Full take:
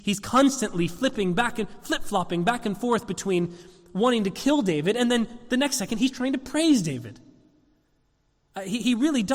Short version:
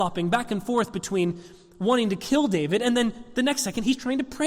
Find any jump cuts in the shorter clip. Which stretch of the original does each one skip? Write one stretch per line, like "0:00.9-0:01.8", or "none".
none